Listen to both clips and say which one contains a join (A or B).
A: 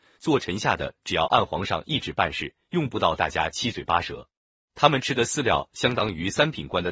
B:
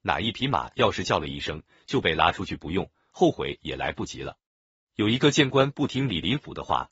A